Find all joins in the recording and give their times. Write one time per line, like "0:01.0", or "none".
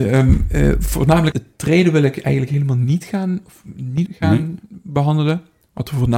0:01.3
0:04.1